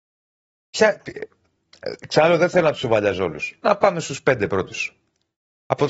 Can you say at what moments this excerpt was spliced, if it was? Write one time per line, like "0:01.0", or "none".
none

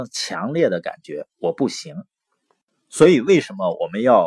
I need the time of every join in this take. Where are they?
none

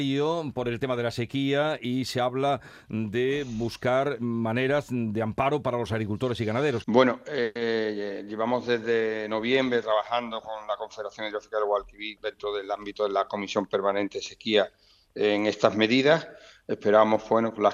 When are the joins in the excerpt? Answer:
0:06.8
0:12.2

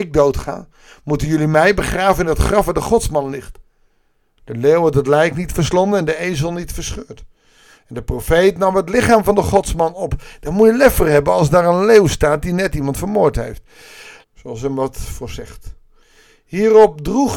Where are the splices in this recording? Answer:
0:04.4
0:14.2

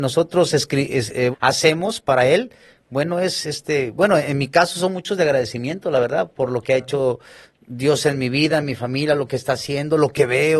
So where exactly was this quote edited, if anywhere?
0:01.3

